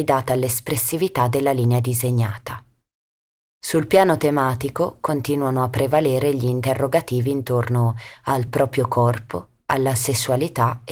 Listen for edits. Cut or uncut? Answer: uncut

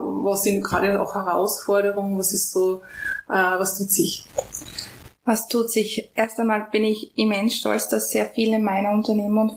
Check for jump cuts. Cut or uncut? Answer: uncut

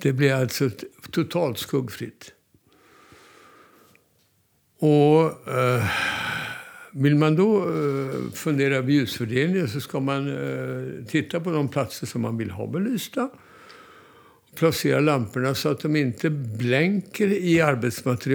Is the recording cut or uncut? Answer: uncut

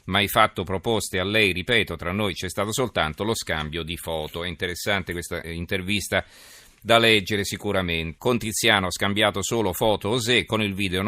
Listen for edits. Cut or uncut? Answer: cut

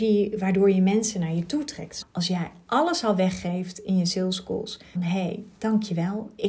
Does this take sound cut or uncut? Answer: cut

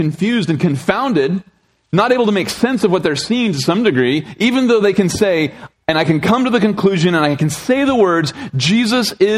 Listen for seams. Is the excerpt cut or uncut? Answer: cut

